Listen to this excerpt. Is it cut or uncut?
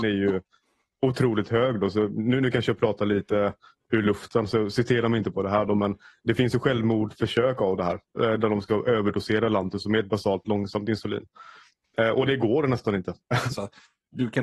cut